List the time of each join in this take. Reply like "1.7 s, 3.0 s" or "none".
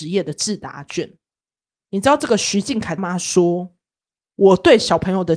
1.8 s, 3.0 s